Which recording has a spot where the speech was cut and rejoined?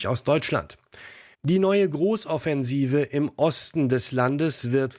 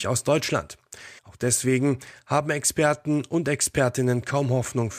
second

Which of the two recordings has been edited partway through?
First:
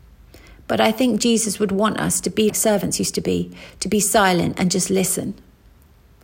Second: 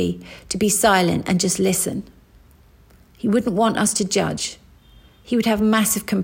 first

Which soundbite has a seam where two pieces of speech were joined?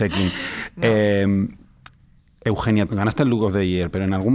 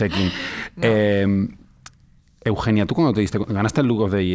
first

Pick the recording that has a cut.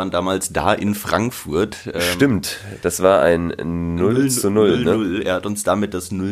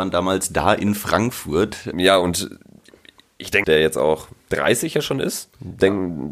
second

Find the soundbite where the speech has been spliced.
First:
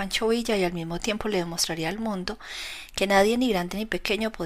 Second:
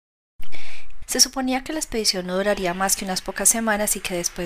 second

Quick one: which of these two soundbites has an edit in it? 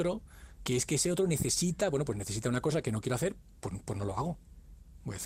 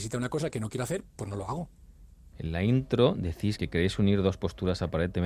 second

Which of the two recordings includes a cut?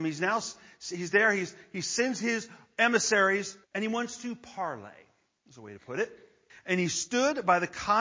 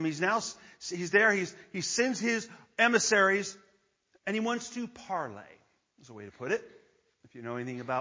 first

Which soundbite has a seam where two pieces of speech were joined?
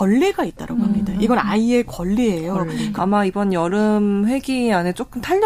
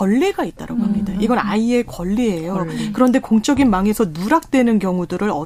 first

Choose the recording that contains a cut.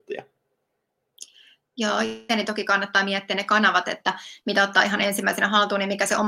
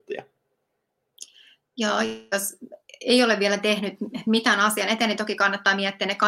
first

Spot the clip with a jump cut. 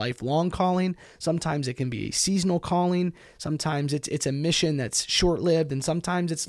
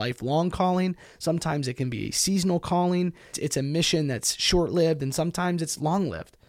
second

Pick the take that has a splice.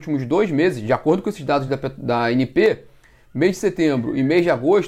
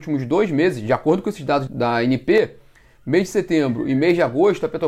second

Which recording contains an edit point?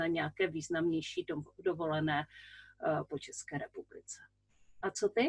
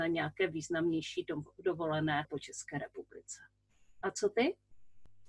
second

